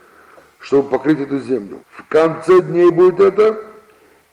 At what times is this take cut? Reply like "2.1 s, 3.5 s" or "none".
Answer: 1.8 s